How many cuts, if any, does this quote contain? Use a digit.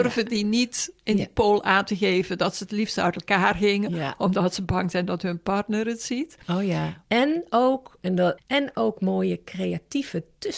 2